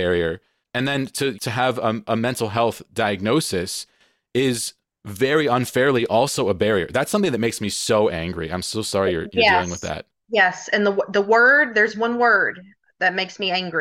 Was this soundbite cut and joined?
yes; 1 cut; at 1.3 s

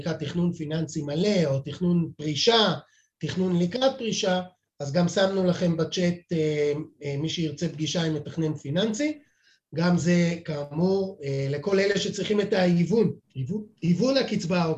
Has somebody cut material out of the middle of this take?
yes; 1 cut; at 13.2 s

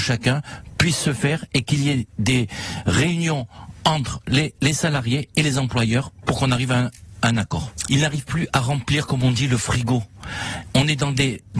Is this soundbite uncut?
no; 1 cut; at 7.9 s

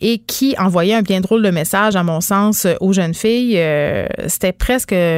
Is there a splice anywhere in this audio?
no; 0 cuts

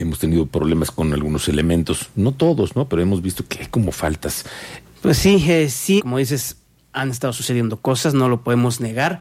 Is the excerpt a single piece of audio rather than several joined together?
no; 2 cuts; at 4.9 s, 6.0 s

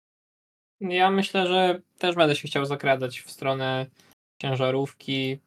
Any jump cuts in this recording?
no; 0 cuts

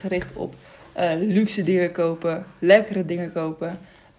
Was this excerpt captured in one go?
yes; 0 cuts

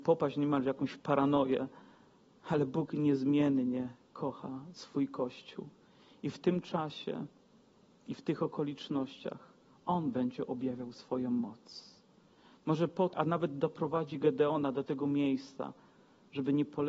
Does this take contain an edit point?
yes; 1 cut; at 13.1 s

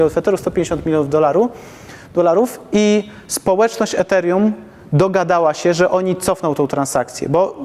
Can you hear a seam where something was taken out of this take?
no; 0 cuts

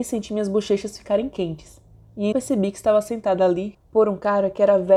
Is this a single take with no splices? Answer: no; 2 cuts; at 2.3 s, 3.7 s

